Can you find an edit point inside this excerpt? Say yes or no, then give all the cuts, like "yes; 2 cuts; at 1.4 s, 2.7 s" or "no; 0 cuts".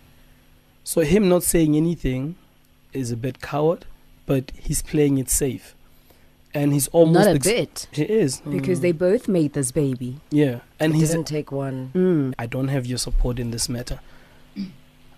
yes; 2 cuts; at 7.9 s, 12.3 s